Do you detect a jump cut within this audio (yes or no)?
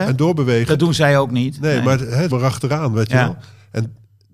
yes